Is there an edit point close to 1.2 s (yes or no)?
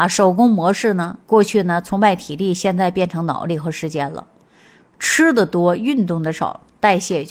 yes